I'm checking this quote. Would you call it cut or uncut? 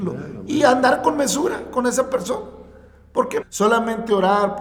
cut